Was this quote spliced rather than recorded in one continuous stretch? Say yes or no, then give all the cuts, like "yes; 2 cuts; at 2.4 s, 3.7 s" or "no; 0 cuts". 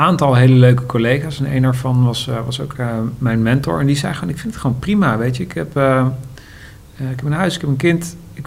no; 0 cuts